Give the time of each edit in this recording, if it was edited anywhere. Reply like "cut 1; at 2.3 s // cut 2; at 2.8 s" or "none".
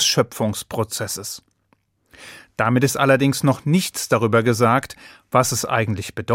none